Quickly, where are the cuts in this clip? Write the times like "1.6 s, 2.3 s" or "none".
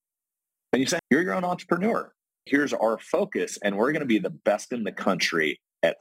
1.0 s, 2.5 s